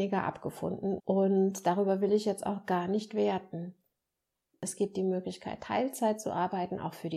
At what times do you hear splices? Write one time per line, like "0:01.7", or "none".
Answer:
0:01.0
0:04.5